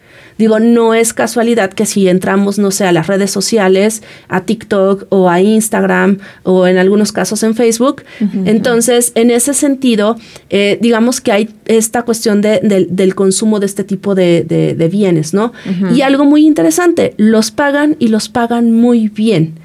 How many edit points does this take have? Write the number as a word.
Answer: one